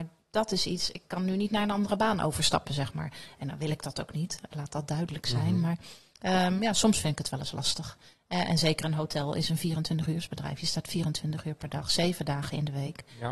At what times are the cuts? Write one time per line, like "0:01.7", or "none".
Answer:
none